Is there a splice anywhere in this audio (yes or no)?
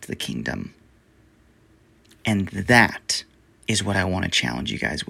no